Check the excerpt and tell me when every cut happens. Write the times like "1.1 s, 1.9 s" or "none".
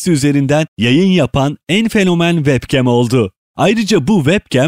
3.5 s